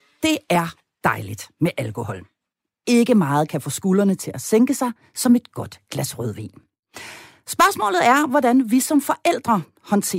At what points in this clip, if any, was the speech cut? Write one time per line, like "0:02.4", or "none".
none